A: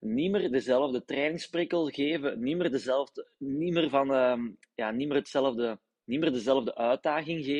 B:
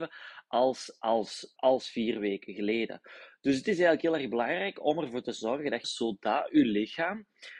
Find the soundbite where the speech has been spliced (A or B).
B